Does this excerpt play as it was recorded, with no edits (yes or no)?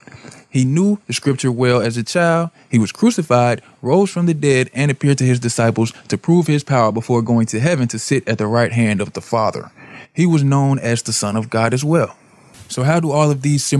yes